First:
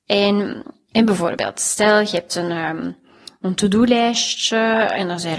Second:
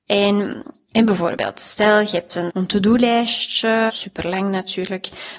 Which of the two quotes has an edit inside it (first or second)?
second